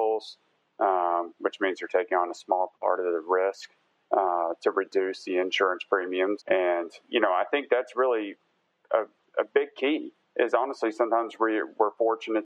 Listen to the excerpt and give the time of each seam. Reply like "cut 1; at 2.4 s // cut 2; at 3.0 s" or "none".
cut 1; at 6.4 s